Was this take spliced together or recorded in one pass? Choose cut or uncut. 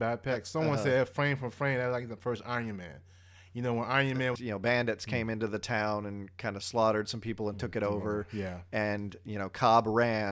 cut